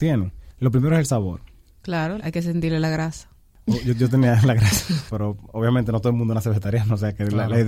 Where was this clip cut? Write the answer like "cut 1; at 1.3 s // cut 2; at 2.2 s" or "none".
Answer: cut 1; at 2.2 s // cut 2; at 5.1 s